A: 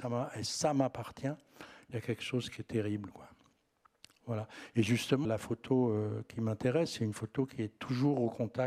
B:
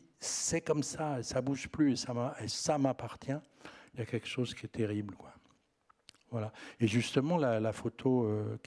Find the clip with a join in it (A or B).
A